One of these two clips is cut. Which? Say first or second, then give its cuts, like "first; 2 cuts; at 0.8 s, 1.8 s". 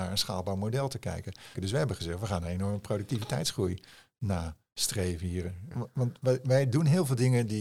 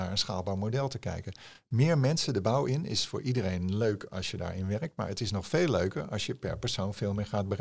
first; 2 cuts; at 1.6 s, 5.7 s